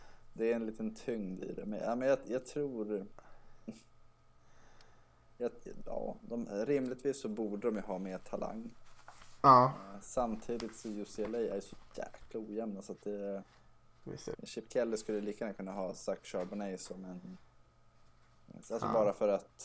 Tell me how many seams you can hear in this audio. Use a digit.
2